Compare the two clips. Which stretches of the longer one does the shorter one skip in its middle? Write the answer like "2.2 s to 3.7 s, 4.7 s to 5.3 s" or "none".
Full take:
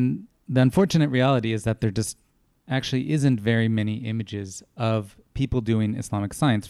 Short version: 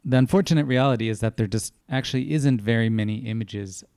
2.2 s to 2.6 s

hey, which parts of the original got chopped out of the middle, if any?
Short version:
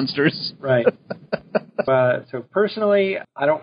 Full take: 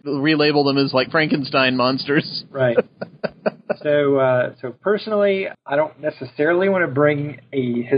3.8 s to 4.2 s

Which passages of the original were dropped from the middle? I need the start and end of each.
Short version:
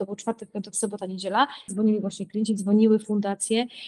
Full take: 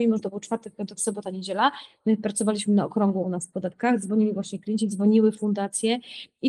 1.9 s to 4.0 s

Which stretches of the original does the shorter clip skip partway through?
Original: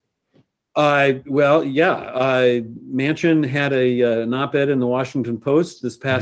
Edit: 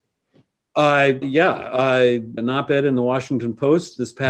1.2 s to 1.6 s, 2.8 s to 4.2 s

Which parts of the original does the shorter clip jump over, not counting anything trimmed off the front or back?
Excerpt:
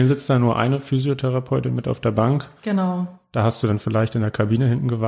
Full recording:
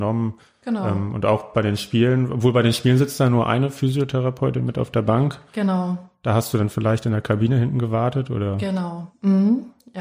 none

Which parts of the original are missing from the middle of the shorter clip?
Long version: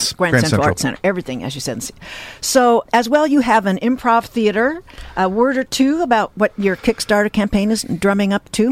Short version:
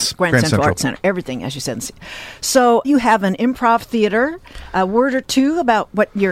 2.8 s to 3.3 s

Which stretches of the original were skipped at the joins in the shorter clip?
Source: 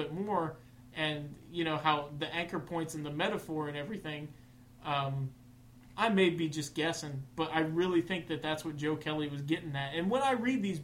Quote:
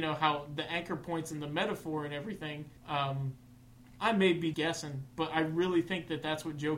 4.4 s to 4.7 s, 6.5 s to 6.7 s

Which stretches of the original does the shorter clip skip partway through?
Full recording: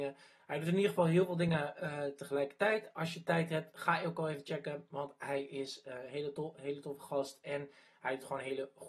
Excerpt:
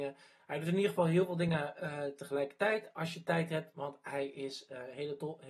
3.7 s to 4.9 s

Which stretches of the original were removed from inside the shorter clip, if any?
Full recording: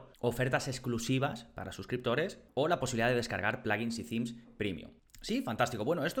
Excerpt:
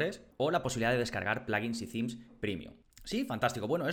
none

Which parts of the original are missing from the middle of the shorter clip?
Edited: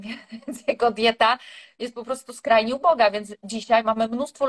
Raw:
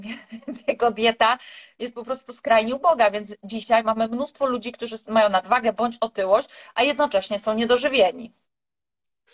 none

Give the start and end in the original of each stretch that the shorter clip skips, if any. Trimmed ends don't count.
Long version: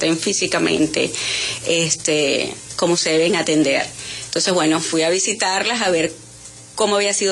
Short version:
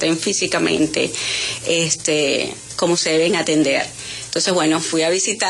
none

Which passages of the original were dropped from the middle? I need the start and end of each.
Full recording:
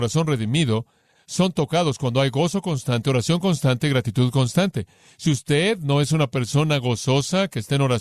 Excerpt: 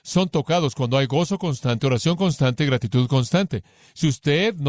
none

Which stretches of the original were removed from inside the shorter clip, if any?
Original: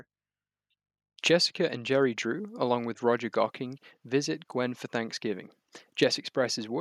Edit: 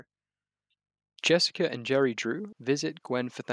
2.5 s to 4.0 s

